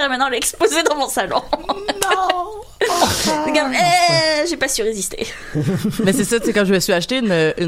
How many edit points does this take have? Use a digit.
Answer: 0